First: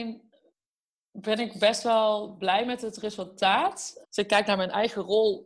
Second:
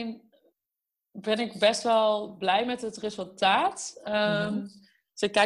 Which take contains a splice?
first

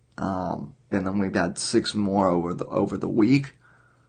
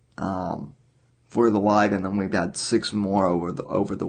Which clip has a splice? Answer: first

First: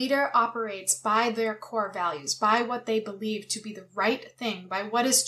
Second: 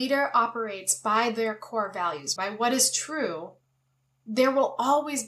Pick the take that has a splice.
second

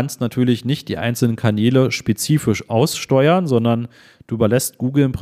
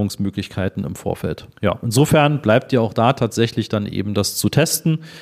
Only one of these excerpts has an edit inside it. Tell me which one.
second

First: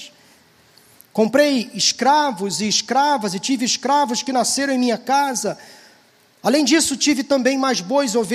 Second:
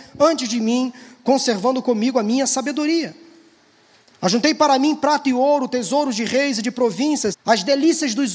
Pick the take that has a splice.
second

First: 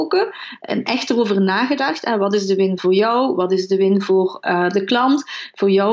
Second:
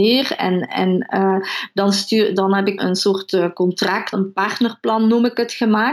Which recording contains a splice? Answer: second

